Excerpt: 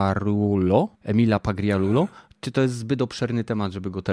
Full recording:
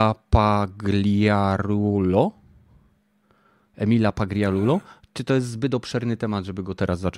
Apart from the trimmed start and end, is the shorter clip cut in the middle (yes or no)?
yes